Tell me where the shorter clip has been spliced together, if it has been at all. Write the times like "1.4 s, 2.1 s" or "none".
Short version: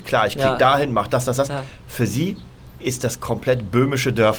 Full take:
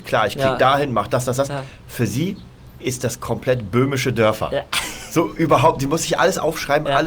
none